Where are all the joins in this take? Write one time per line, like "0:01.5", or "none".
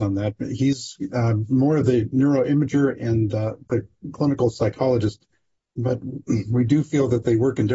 none

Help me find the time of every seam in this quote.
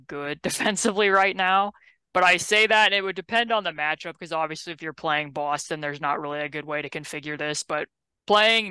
none

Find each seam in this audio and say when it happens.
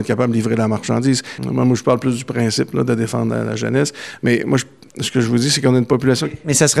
0:01.4

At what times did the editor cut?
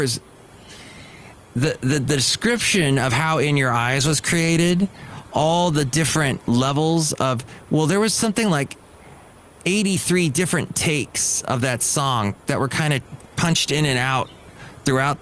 none

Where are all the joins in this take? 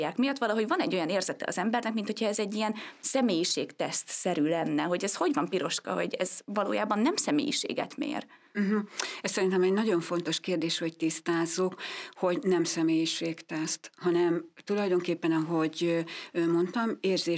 none

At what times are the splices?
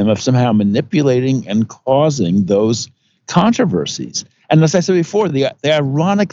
none

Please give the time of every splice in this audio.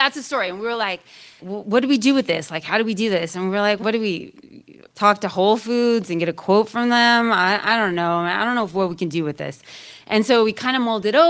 0:01.4
0:03.8
0:04.9

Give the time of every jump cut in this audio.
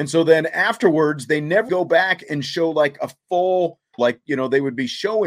0:01.7
0:04.0

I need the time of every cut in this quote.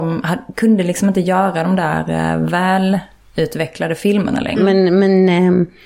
0:04.6

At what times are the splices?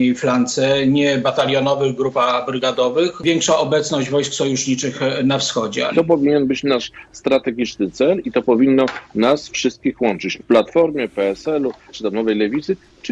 0:05.9
0:10.4
0:11.9

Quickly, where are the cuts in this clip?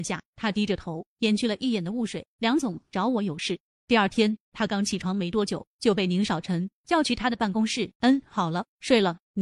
0:03.7
0:08.0

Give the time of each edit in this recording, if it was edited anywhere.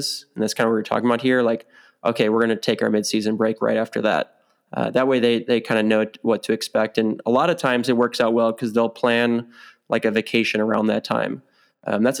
none

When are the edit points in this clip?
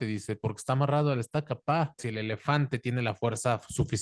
0:02.0

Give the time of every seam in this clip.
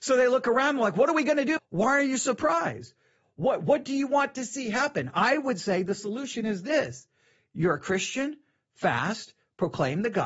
0:01.6
0:08.6

